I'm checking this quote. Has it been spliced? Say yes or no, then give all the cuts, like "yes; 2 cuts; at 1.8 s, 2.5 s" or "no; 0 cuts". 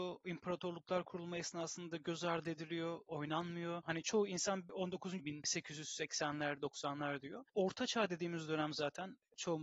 yes; 3 cuts; at 3.8 s, 5.2 s, 7.5 s